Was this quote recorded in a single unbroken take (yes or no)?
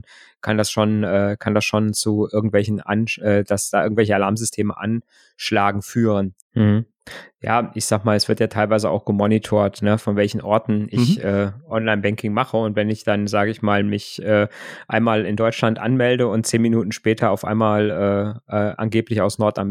no